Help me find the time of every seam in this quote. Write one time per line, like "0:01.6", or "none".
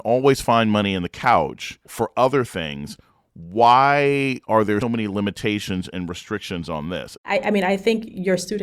0:04.8
0:07.2